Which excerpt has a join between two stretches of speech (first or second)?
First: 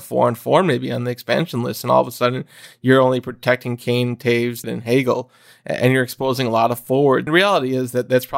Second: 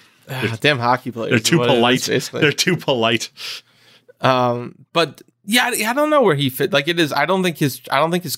first